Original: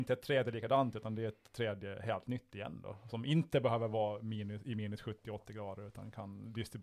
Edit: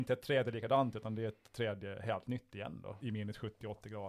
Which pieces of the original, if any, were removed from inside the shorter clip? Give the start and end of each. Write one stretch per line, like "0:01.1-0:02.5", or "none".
0:03.0-0:04.6